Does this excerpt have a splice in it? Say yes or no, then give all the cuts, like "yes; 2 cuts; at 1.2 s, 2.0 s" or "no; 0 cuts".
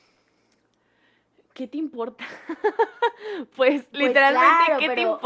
no; 0 cuts